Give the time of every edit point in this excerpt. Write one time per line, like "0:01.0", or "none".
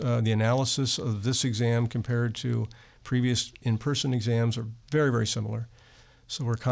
none